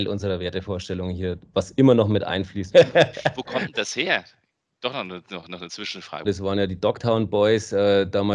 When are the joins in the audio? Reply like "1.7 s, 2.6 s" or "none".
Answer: 2.7 s, 6.2 s